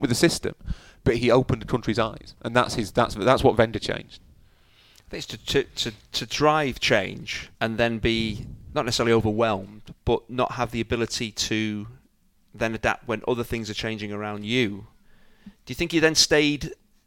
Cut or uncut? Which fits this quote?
cut